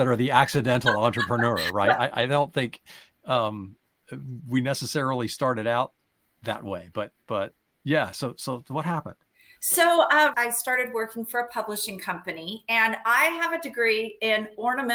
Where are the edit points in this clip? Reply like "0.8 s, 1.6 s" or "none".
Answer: 10.3 s